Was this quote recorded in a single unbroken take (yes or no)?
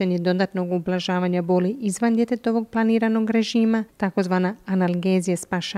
yes